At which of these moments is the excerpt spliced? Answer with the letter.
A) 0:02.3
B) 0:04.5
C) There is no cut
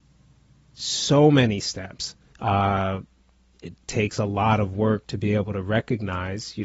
A